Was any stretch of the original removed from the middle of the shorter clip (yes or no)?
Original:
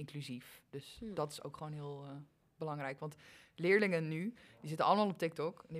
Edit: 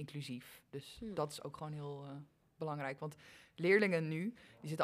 no